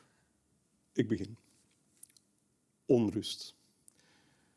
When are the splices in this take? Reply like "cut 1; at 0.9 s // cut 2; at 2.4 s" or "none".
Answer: none